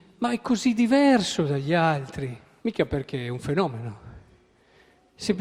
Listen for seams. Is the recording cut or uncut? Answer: cut